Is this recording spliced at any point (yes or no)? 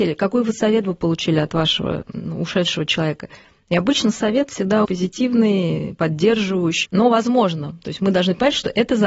yes